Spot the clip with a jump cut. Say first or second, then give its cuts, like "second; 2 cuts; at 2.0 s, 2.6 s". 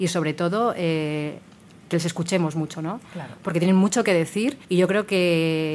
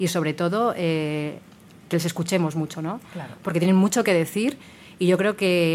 first; 1 cut; at 4.6 s